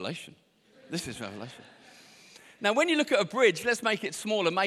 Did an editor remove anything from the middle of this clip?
no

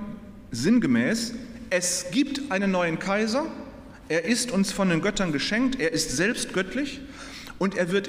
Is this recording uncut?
yes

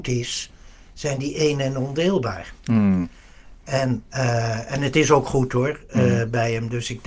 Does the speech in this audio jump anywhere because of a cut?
no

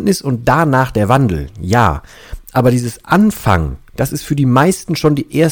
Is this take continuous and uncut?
yes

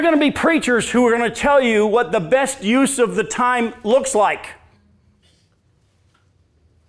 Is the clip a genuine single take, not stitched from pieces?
yes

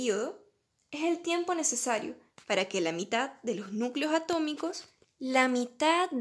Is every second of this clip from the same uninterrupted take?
no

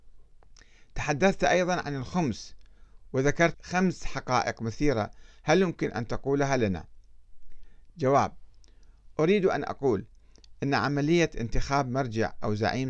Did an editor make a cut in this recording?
yes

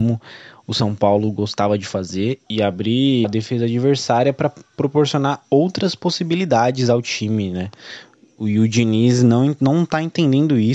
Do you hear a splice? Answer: yes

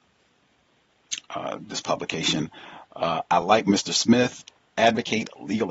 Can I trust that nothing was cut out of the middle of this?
yes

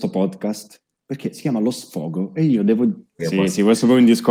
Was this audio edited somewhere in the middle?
yes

